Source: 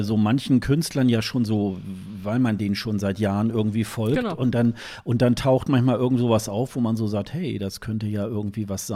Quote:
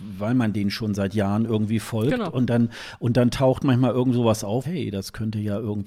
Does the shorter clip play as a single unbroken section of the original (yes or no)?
no